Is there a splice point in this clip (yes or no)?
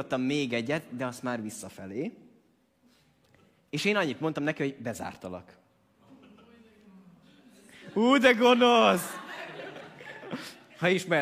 no